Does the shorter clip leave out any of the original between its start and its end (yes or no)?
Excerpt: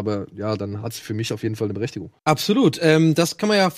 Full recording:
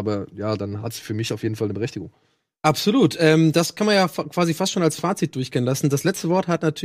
yes